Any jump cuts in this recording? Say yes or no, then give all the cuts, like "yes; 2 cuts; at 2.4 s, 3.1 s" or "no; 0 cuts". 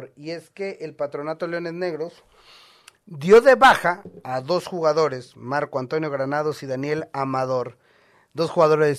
no; 0 cuts